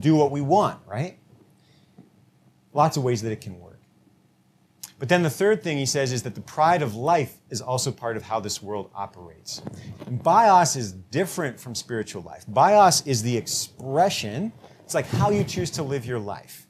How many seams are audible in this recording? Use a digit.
1